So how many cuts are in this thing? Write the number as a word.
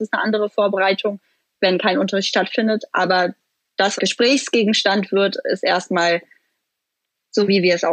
one